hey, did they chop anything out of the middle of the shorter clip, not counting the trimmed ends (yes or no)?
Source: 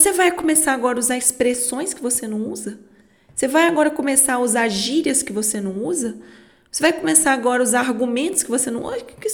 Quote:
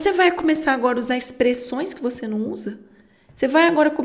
no